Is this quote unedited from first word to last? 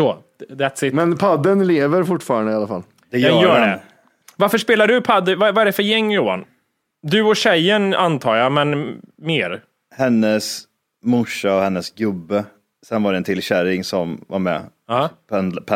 yes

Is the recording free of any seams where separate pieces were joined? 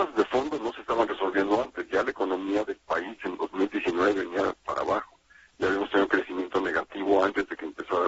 yes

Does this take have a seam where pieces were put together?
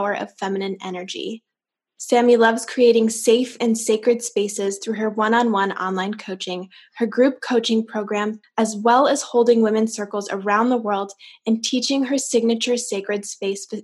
yes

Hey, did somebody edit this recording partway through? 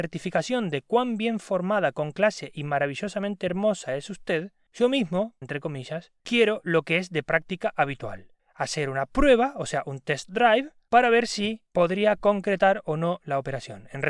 yes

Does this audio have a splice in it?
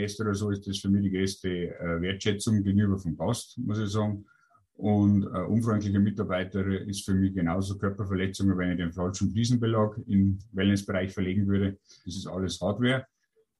yes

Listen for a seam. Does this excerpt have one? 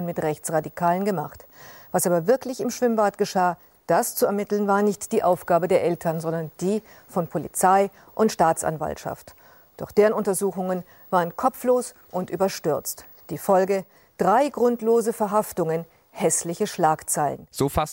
no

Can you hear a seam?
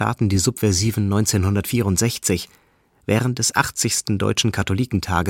no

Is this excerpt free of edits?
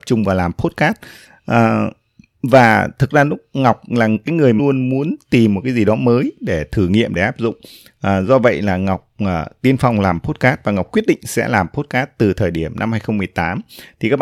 no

